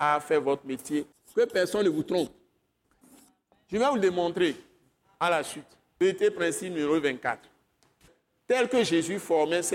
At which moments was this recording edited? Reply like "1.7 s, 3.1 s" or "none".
1.1 s